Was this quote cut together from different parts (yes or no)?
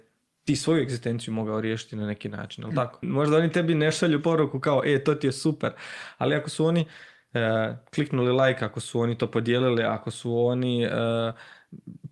yes